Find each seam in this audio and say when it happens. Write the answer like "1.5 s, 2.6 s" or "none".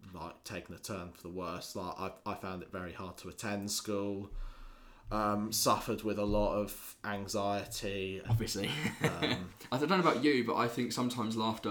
8.2 s